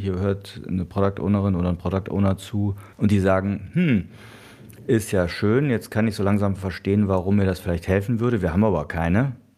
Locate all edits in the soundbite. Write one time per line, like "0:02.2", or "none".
0:02.9